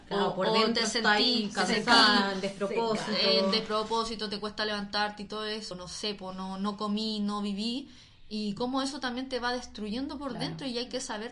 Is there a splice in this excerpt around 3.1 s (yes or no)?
no